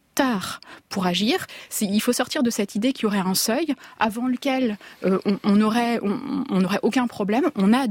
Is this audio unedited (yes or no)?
yes